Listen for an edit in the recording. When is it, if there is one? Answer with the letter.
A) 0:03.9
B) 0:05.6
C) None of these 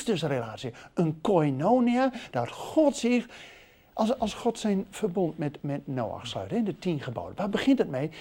B